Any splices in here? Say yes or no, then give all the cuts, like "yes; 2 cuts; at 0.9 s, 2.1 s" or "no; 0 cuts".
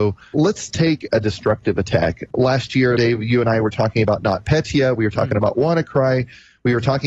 yes; 1 cut; at 3.0 s